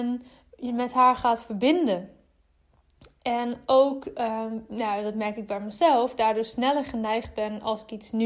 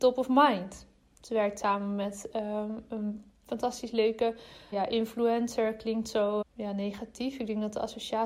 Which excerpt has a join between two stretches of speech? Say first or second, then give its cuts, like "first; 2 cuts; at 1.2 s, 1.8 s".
second; 2 cuts; at 4.7 s, 6.4 s